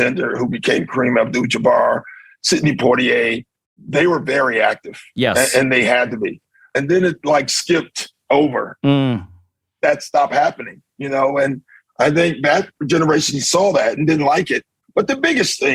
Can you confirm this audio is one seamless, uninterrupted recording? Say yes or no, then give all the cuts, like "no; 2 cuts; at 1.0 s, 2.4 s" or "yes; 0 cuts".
yes; 0 cuts